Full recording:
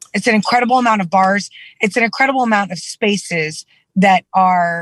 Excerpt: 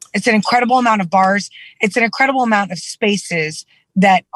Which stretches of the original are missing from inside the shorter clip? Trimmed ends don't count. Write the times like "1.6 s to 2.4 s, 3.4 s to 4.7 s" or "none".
none